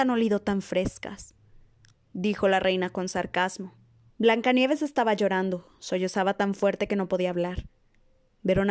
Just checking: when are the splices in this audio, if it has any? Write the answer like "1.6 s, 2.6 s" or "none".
4.1 s